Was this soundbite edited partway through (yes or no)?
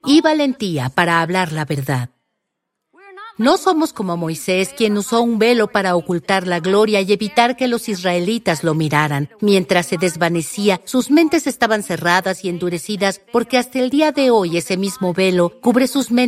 no